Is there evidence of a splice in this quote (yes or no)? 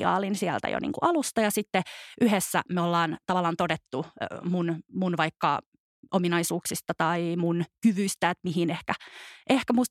no